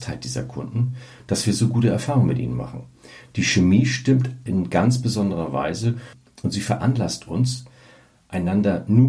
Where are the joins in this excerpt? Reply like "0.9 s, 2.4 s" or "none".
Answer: 4.5 s